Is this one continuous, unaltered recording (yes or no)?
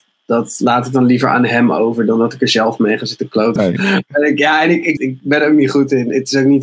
no